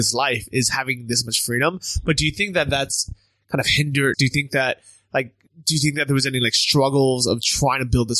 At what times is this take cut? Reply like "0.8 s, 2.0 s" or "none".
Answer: 4.1 s

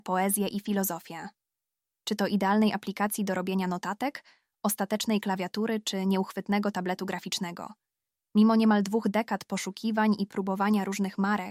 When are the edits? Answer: 2.0 s

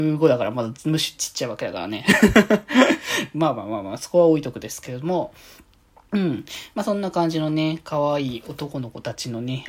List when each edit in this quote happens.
none

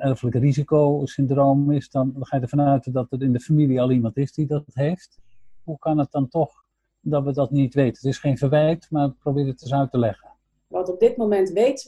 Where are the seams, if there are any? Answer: 10.7 s

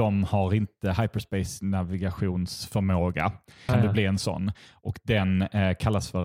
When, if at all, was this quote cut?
3.7 s

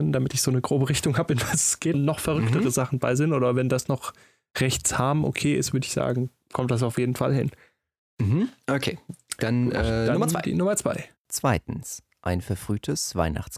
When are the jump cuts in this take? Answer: 1.9 s

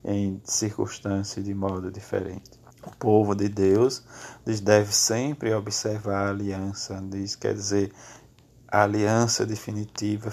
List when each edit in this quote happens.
2.7 s

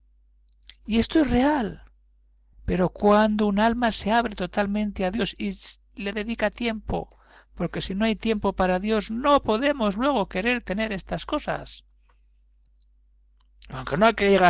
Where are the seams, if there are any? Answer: none

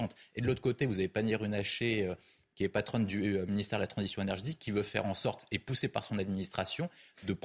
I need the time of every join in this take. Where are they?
none

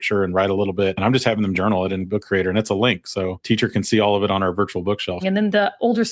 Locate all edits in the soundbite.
5.2 s

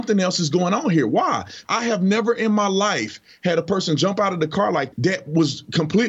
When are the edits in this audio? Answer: 1.6 s, 4.9 s

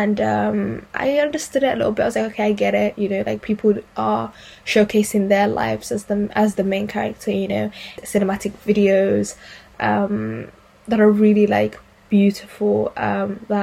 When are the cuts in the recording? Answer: none

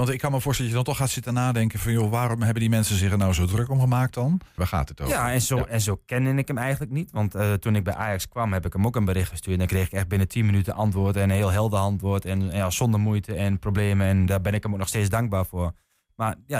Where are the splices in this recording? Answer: 4.6 s

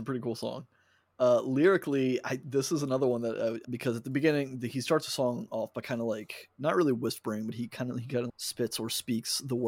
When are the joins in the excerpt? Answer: 3.6 s, 8.3 s

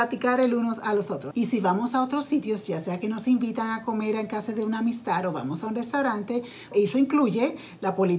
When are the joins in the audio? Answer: 1.3 s, 6.7 s

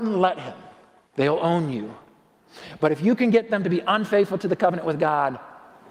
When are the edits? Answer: 1.1 s

